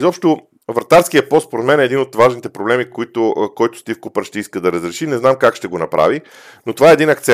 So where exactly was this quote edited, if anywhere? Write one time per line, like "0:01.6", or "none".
none